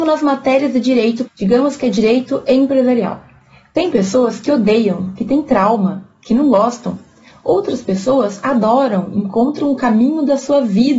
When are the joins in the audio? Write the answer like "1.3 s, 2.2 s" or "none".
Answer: 1.2 s